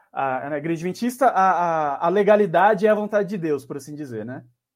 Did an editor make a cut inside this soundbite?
no; 0 cuts

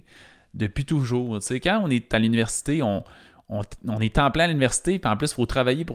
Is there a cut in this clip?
no; 0 cuts

